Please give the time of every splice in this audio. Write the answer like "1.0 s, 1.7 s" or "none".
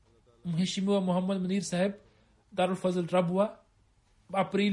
none